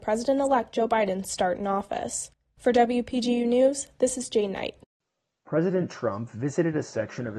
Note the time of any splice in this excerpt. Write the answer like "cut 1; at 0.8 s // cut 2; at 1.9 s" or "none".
none